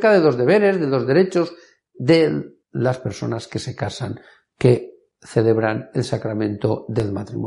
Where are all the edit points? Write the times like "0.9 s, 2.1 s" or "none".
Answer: 2.6 s